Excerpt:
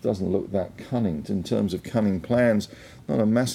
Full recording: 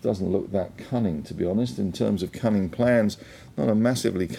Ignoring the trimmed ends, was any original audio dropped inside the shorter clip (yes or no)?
yes